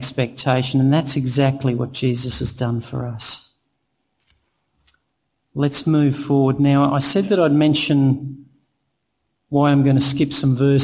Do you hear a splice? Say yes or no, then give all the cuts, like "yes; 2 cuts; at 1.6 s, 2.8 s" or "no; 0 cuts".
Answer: no; 0 cuts